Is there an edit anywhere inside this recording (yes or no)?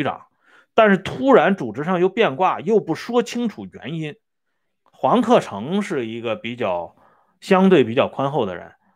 yes